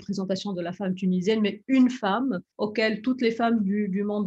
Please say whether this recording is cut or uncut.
cut